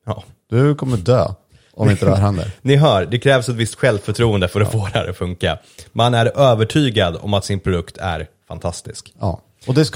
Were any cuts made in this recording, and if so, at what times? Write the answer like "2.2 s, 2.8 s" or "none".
none